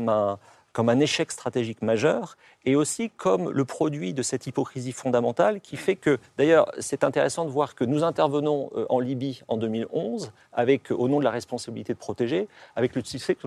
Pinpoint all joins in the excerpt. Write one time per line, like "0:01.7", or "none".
none